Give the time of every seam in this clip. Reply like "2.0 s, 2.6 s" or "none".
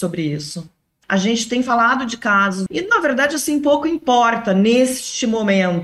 1.0 s, 2.7 s